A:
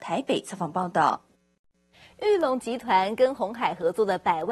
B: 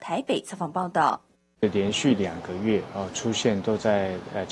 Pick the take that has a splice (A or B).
B